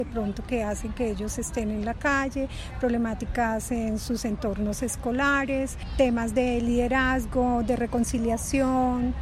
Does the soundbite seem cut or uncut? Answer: uncut